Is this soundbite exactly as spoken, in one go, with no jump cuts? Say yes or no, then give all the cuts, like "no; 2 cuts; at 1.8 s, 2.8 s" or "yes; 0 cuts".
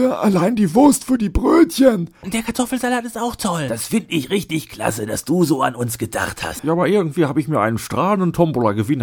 no; 2 cuts; at 2.2 s, 6.6 s